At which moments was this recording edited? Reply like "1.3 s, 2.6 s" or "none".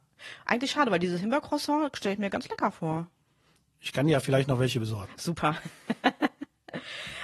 none